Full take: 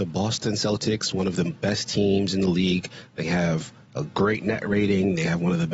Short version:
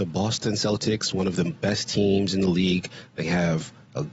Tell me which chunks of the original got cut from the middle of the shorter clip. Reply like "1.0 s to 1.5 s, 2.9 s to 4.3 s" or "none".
none